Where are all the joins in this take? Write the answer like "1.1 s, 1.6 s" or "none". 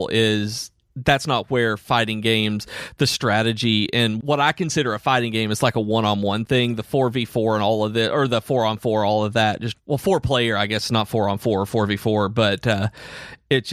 4.2 s, 9.7 s